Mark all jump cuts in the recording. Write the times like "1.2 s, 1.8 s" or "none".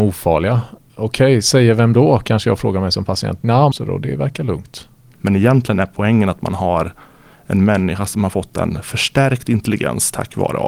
3.7 s, 5.1 s